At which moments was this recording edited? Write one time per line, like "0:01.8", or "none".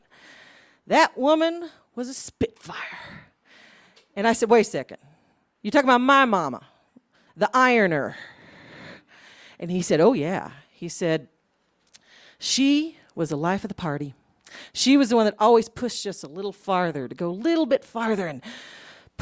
0:07.3